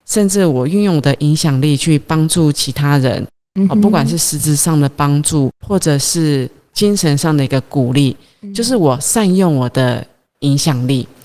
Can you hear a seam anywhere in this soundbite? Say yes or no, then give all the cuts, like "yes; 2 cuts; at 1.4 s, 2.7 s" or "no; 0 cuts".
yes; 1 cut; at 5.5 s